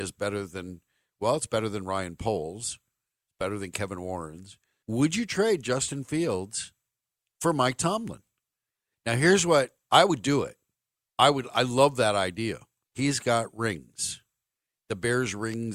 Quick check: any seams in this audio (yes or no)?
yes